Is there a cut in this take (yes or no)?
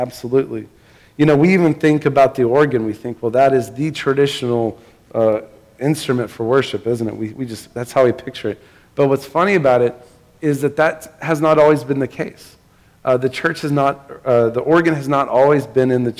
no